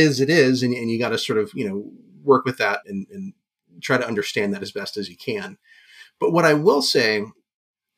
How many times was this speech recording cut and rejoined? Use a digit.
1